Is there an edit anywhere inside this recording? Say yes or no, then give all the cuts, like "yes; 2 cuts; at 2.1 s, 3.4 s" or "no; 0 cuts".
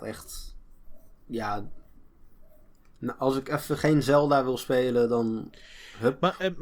no; 0 cuts